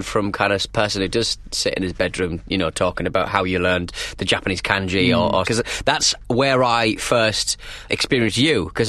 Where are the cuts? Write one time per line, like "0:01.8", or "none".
0:05.4
0:07.9